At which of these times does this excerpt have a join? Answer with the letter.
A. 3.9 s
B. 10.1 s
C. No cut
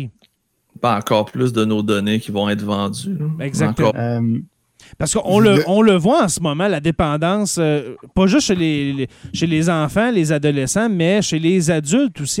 A